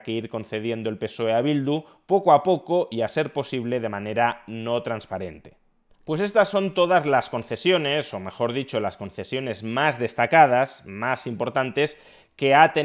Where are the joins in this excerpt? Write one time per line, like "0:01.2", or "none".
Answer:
none